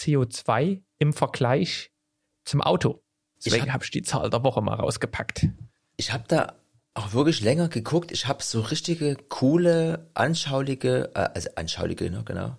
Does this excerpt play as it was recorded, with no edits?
no; 1 cut; at 3.4 s

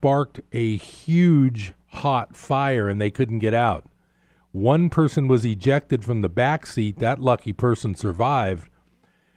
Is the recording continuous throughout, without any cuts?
yes; 0 cuts

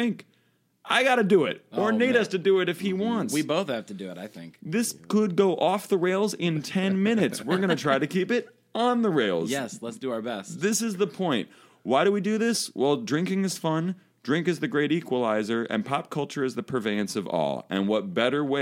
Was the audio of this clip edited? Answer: no; 0 cuts

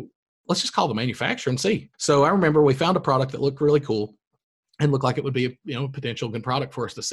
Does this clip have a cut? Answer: yes; 1 cut; at 1.9 s

